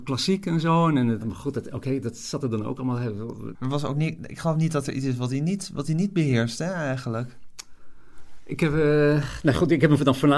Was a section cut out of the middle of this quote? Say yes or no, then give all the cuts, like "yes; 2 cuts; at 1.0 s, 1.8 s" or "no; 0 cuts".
yes; 1 cut; at 3.5 s